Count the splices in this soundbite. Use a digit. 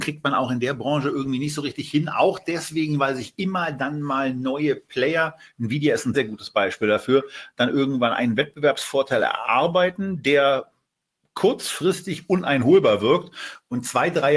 1